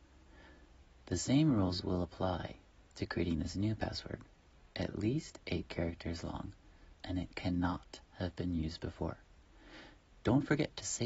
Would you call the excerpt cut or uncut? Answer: cut